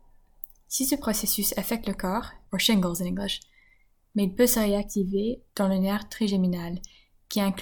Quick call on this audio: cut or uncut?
cut